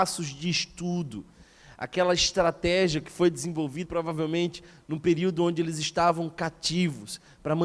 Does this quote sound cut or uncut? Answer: cut